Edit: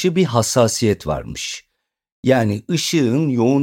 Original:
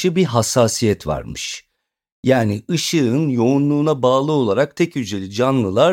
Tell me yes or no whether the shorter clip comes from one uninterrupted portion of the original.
yes